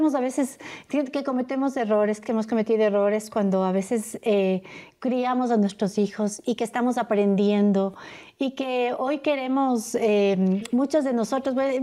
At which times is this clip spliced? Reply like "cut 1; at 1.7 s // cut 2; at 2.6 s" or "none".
none